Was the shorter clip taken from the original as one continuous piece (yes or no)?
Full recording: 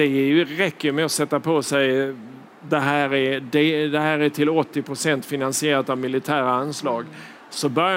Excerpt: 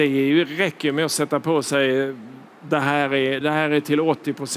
no